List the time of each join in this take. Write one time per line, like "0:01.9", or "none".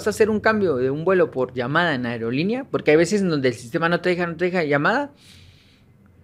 none